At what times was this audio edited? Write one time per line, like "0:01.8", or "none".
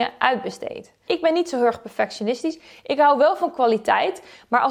0:01.1